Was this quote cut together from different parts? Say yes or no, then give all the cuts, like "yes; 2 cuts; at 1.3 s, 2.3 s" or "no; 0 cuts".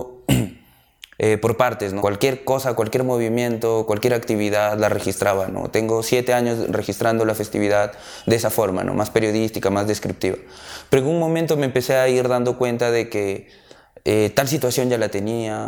yes; 1 cut; at 2.0 s